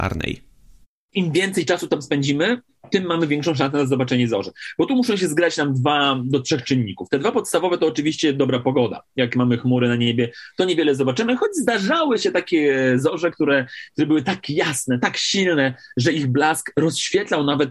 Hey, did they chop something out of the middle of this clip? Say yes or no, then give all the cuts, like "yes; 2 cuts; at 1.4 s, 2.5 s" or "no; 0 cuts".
no; 0 cuts